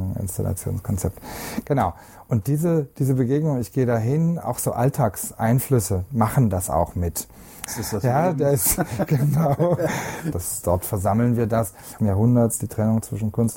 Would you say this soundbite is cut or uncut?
cut